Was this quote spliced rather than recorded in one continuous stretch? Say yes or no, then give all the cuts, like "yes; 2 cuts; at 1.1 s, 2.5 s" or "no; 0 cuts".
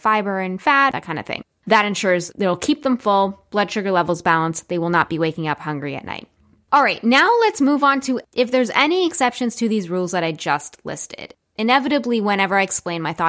yes; 2 cuts; at 0.9 s, 2.3 s